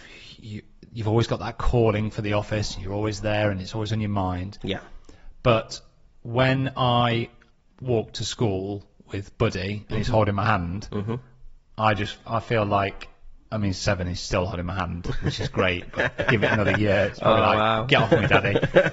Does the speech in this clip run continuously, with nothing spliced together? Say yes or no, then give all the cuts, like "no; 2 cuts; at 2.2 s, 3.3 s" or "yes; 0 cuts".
yes; 0 cuts